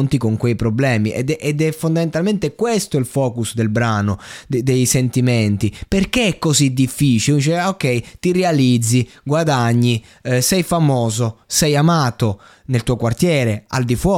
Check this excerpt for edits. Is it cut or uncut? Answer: uncut